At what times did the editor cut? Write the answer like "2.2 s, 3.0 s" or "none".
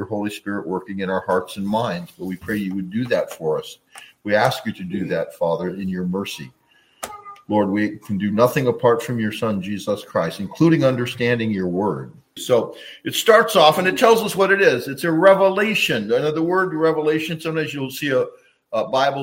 12.4 s